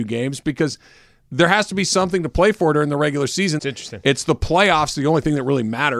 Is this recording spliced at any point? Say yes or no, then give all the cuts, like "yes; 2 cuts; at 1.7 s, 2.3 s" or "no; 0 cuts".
yes; 1 cut; at 3.6 s